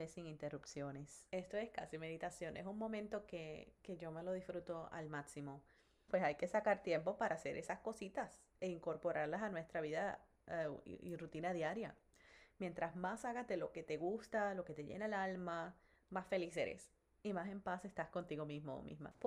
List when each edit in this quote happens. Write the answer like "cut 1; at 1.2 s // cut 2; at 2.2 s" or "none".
cut 1; at 3.8 s // cut 2; at 6.1 s